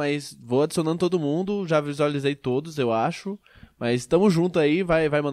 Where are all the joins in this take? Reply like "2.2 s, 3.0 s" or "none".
none